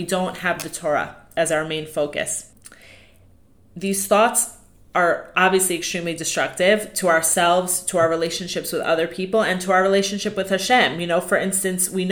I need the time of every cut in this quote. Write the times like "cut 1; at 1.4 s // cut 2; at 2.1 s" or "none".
none